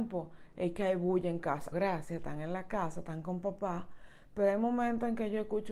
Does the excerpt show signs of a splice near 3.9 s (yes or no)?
no